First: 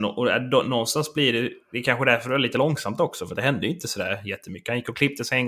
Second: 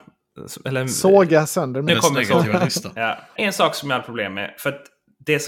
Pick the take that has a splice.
second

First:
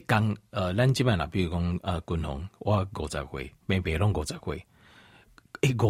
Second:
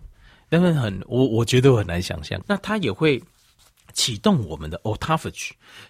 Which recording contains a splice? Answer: second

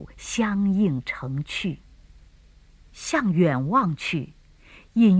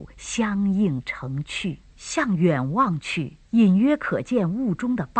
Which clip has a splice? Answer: second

